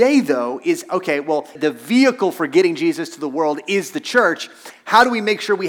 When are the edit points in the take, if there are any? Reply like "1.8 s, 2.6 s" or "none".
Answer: 1.6 s